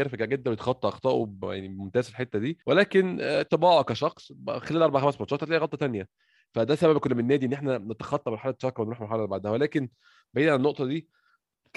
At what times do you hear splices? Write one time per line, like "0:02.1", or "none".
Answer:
0:02.6